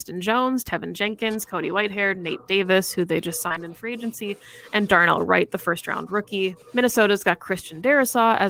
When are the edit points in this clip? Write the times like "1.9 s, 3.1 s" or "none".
6.6 s